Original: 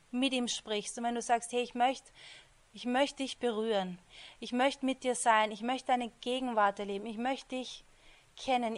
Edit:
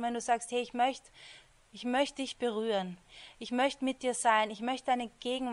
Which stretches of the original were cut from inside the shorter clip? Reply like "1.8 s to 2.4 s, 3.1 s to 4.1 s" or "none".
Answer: none